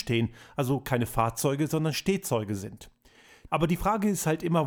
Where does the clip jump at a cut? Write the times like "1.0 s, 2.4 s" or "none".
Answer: 3.5 s